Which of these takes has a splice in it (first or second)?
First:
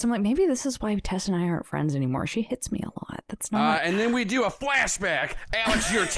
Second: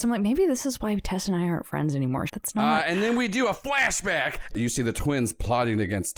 second